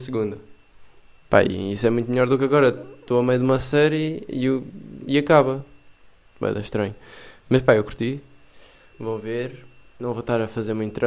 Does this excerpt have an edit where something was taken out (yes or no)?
yes